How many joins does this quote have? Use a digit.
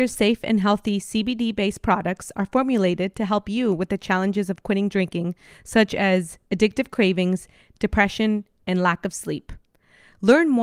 1